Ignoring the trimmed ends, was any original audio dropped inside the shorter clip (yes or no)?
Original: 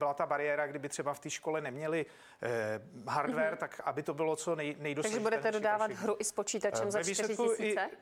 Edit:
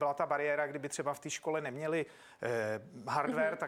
no